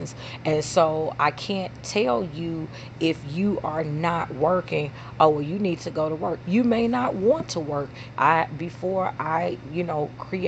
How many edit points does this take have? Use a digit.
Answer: 2